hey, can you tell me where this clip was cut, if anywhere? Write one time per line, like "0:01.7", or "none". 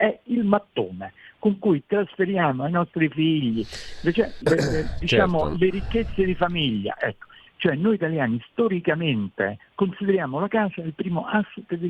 0:04.4
0:07.5
0:09.6